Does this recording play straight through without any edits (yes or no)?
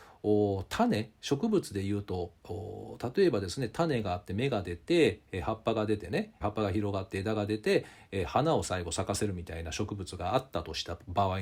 no